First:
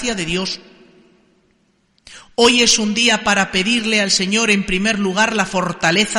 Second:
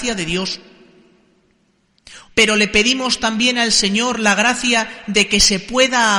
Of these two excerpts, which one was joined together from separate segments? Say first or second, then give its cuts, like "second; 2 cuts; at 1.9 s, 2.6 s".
second; 1 cut; at 2.3 s